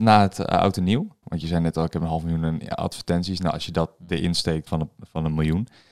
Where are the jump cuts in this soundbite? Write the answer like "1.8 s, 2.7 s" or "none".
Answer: 1.2 s, 4.7 s